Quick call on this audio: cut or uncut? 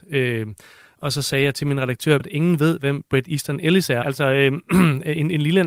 cut